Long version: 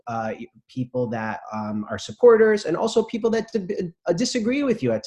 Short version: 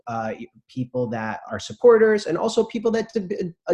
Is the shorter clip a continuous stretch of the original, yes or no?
no